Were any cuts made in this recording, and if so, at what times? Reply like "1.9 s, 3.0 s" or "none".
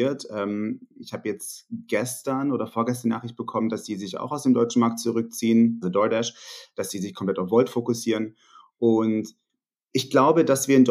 5.8 s